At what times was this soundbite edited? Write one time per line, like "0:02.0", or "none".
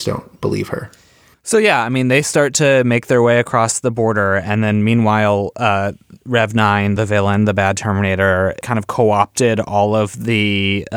none